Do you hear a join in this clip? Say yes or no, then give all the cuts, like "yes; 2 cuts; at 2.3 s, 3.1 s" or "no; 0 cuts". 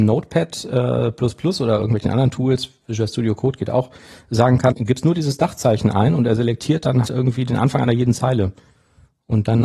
yes; 2 cuts; at 4.7 s, 7.0 s